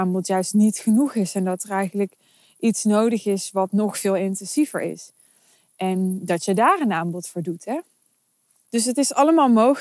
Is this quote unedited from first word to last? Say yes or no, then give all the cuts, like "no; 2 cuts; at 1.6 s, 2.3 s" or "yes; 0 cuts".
yes; 0 cuts